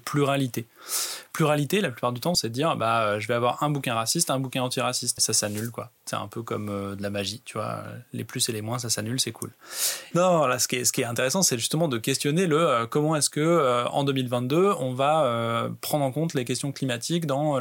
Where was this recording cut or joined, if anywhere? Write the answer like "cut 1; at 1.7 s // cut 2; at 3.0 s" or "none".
cut 1; at 2.3 s // cut 2; at 5.2 s // cut 3; at 10.1 s